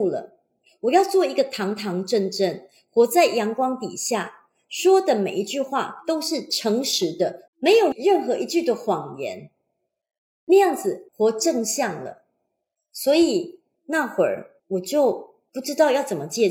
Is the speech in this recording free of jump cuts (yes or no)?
no